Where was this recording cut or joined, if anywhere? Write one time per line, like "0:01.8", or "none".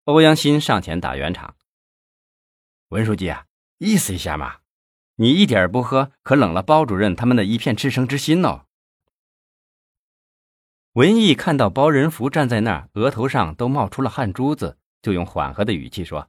0:09.0